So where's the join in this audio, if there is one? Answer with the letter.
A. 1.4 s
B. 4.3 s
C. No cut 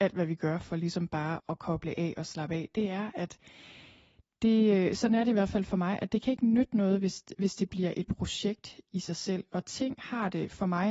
A